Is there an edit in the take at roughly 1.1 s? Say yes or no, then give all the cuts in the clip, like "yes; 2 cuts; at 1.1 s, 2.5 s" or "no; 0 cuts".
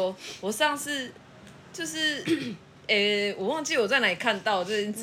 no; 0 cuts